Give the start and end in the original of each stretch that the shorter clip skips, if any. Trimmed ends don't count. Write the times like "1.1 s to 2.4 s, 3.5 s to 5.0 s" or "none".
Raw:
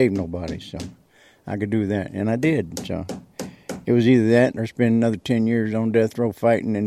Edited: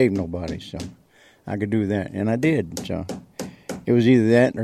none